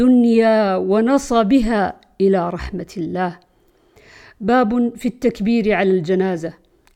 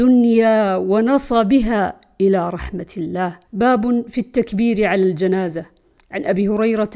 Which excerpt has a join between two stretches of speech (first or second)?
second